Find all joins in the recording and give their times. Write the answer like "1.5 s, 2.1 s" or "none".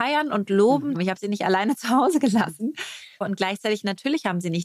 0.9 s, 3.2 s